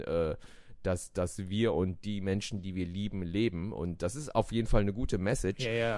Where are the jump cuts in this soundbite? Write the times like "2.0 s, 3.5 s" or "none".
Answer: none